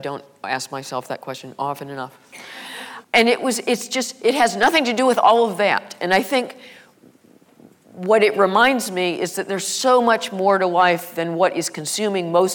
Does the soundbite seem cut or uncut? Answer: cut